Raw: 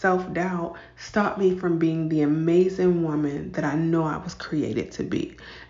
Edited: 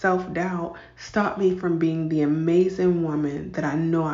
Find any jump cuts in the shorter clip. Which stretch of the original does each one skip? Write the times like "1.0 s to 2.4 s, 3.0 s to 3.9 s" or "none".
none